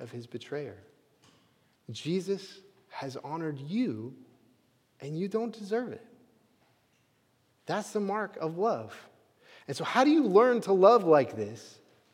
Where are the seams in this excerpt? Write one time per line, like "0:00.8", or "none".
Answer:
0:01.8